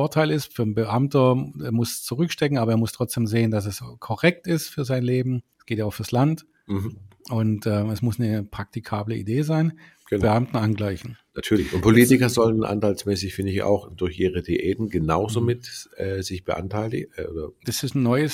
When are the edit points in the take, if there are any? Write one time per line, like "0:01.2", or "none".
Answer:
0:05.5
0:10.2